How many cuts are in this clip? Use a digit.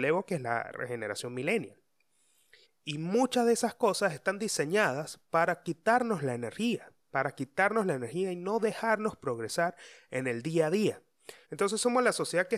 3